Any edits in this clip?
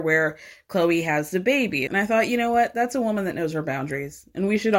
yes; 1 cut; at 1.9 s

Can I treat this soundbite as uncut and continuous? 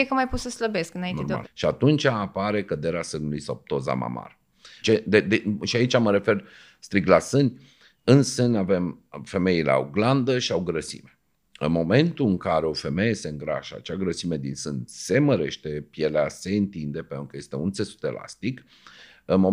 no; 2 cuts; at 1.4 s, 4.8 s

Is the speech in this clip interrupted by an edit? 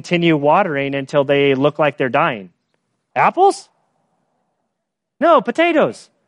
yes; 1 cut; at 3.1 s

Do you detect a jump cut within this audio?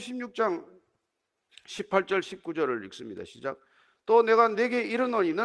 no; 0 cuts

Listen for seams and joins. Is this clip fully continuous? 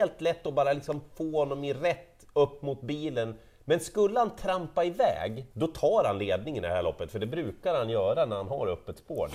no; 1 cut; at 5.5 s

